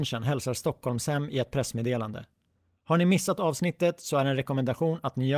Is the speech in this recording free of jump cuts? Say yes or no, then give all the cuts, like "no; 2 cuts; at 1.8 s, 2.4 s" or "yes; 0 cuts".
yes; 0 cuts